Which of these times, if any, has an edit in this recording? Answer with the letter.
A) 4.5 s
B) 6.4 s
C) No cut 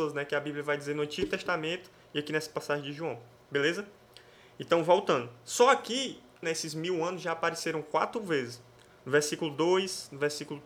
B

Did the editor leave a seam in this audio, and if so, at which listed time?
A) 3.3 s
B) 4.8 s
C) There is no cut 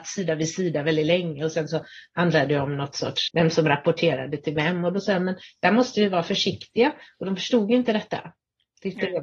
A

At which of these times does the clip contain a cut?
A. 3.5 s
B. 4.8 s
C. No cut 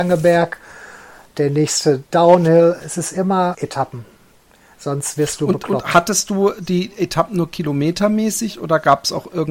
A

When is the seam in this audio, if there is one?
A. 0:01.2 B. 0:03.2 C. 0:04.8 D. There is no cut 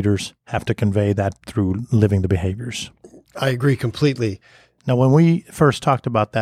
C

